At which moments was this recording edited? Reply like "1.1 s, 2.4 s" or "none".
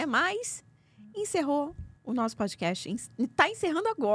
2.0 s